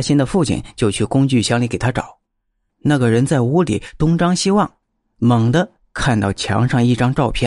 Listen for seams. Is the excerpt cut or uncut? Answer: uncut